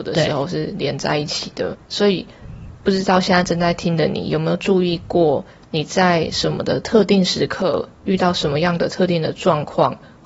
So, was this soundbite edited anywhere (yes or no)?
yes